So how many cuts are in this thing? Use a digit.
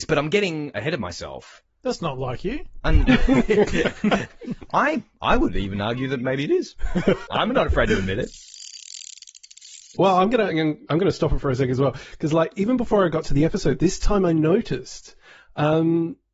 2